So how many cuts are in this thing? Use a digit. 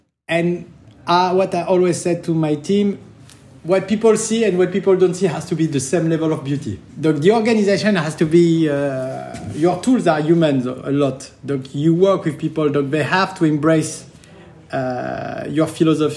1